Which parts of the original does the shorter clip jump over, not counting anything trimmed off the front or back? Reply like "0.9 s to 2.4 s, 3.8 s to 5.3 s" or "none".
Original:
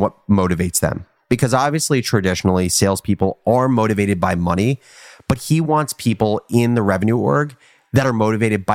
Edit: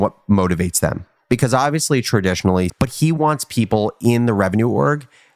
2.7 s to 5.2 s